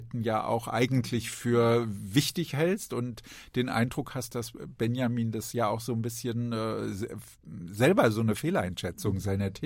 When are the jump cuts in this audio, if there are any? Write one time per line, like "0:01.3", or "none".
none